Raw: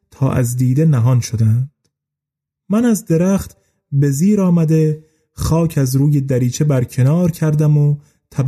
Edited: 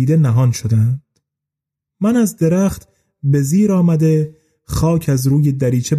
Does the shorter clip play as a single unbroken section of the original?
yes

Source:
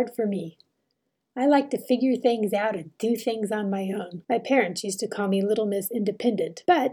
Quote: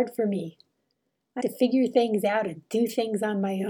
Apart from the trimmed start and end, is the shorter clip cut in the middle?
yes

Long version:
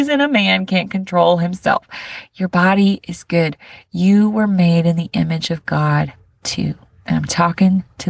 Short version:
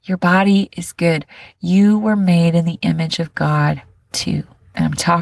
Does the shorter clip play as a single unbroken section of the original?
yes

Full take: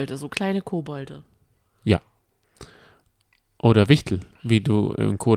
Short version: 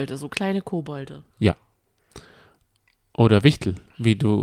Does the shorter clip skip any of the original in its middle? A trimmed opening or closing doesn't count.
yes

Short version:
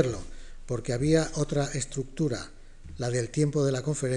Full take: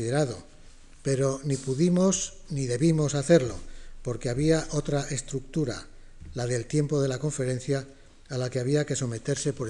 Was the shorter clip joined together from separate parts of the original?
no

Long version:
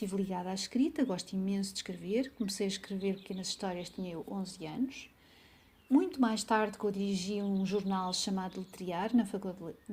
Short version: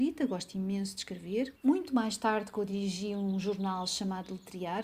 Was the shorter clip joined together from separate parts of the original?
yes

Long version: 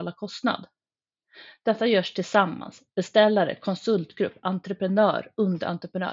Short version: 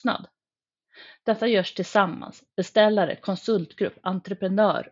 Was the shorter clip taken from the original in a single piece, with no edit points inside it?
yes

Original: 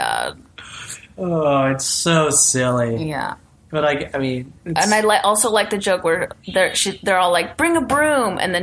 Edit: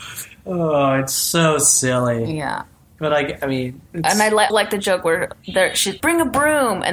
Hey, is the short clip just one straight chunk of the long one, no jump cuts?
no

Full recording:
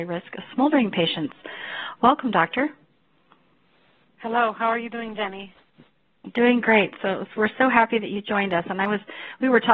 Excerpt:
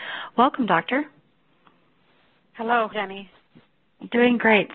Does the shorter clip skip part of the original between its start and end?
yes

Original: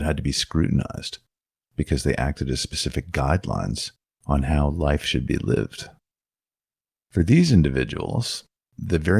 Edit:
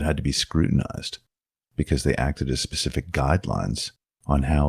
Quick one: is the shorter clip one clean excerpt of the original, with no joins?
yes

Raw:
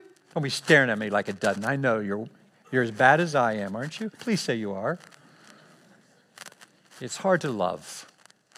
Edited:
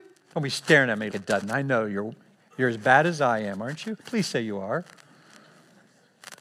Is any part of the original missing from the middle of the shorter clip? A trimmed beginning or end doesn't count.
yes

